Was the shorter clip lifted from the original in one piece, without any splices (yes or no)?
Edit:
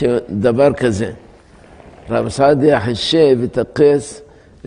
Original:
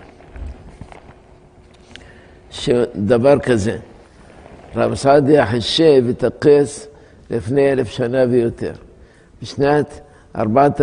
yes